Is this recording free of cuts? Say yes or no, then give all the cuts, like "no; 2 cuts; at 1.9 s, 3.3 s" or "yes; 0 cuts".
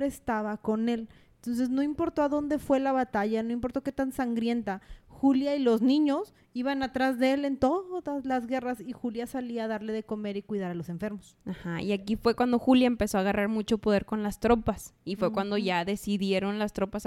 yes; 0 cuts